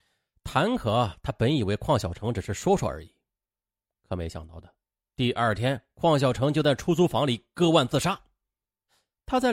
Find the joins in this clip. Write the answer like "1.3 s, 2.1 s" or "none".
none